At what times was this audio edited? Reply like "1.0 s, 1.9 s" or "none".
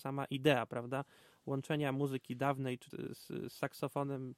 2.9 s